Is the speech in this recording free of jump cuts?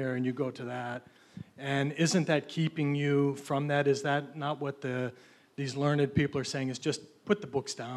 yes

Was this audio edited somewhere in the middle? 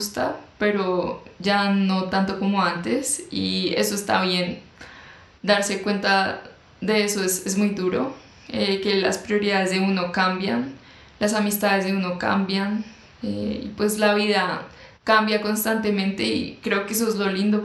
no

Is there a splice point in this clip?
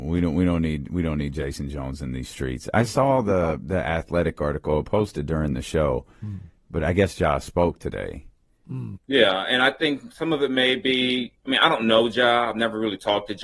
yes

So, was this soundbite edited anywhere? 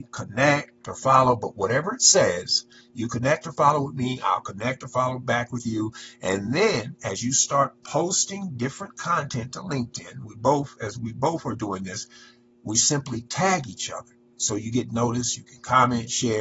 no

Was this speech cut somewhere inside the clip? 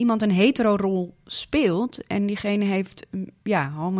no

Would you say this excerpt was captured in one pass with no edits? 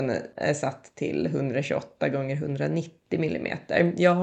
yes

